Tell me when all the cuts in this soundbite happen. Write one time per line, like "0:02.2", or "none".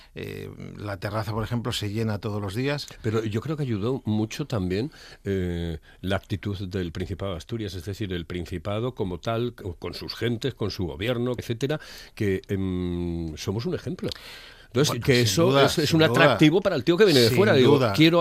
0:11.4
0:15.0